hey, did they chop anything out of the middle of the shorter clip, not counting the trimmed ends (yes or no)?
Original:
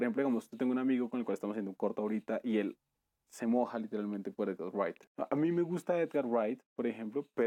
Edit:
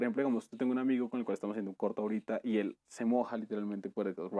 yes